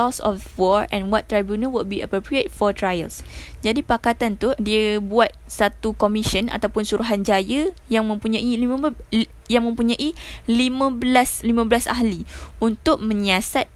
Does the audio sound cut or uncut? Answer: cut